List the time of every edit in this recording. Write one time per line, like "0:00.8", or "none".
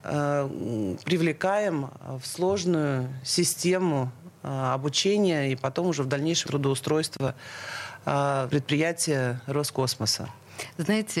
0:06.5
0:08.5